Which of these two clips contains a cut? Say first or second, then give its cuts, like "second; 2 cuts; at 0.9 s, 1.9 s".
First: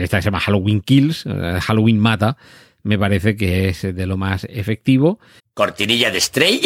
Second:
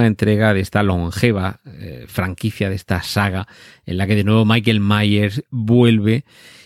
first; 1 cut; at 5.4 s